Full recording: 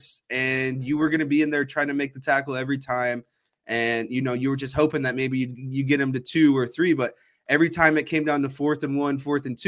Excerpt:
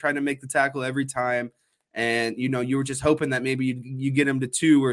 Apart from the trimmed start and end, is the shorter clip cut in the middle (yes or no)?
no